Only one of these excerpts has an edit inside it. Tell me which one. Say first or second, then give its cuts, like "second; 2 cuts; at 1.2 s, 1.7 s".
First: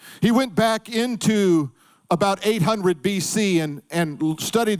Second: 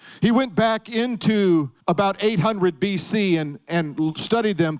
second; 1 cut; at 1.8 s